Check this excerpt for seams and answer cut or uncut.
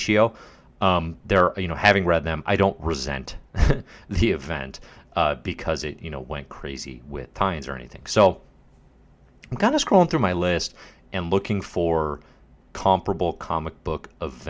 cut